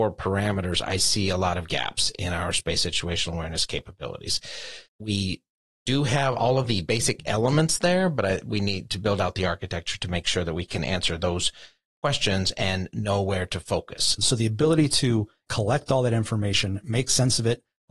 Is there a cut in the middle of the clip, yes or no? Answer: yes